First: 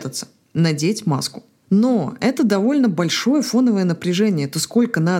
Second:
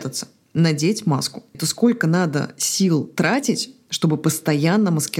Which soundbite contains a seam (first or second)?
second